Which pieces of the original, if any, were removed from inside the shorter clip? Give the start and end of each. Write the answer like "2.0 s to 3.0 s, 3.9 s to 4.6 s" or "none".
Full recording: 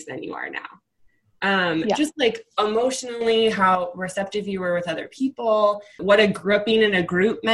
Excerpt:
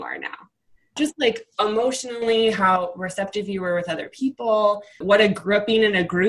1.3 s to 2.0 s